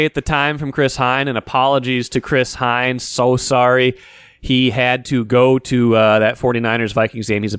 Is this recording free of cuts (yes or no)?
yes